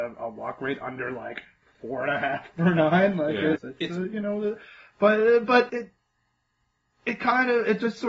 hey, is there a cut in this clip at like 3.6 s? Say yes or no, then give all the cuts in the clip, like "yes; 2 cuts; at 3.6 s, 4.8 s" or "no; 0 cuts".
yes; 2 cuts; at 3.6 s, 5.7 s